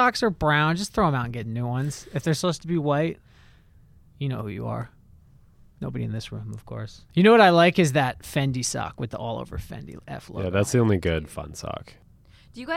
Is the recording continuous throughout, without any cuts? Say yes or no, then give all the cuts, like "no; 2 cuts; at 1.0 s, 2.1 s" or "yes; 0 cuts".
no; 1 cut; at 7.1 s